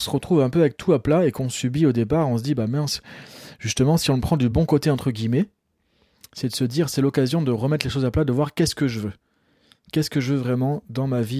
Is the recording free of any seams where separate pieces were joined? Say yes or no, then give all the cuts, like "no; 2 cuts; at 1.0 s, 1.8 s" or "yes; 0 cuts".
yes; 0 cuts